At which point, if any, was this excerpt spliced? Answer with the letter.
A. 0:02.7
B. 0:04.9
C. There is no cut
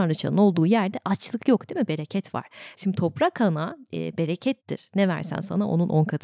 A